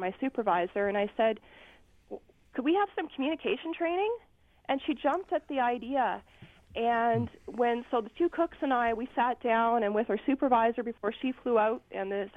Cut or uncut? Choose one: uncut